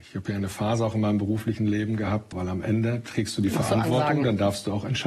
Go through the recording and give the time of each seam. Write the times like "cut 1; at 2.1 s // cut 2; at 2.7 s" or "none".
cut 1; at 2.3 s